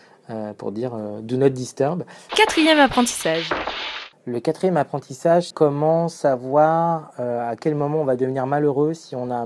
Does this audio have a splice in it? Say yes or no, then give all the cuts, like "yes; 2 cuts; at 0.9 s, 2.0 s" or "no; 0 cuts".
yes; 2 cuts; at 2.3 s, 5.5 s